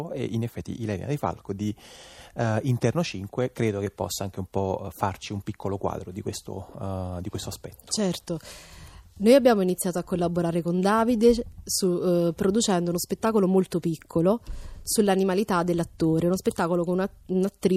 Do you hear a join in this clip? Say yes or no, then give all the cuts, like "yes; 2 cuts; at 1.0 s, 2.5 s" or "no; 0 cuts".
no; 0 cuts